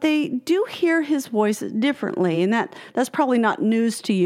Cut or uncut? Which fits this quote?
uncut